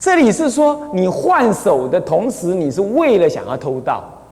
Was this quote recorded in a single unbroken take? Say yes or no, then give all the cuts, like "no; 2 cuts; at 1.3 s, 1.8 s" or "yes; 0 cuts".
yes; 0 cuts